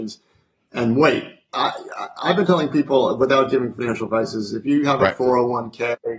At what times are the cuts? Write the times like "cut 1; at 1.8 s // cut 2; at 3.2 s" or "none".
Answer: cut 1; at 1.5 s